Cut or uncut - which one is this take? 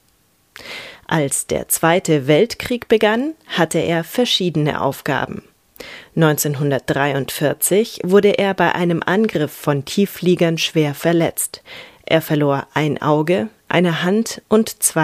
uncut